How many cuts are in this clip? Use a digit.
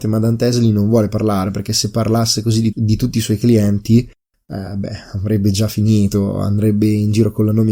1